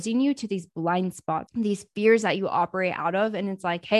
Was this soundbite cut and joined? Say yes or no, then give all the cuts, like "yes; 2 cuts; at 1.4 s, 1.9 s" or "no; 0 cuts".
yes; 1 cut; at 1.5 s